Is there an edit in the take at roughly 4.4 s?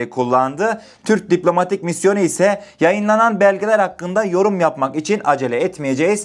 no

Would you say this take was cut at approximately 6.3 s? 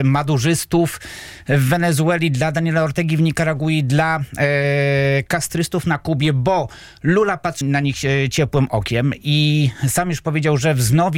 no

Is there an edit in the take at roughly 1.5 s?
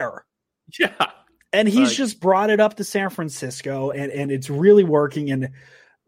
no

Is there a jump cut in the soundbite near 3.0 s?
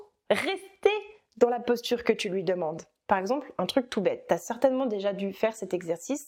yes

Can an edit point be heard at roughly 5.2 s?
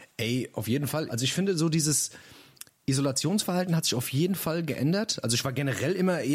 no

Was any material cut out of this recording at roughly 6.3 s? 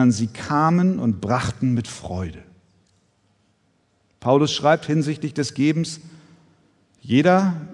no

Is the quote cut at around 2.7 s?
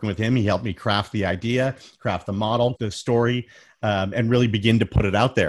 yes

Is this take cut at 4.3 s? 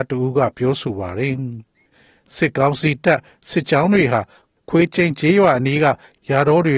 no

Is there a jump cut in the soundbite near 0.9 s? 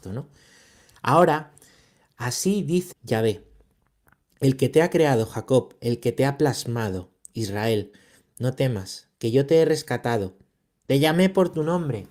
no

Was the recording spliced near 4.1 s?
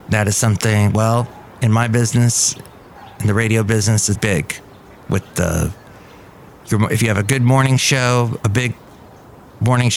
yes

